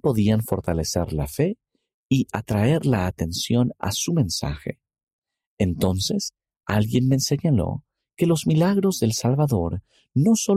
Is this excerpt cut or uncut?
uncut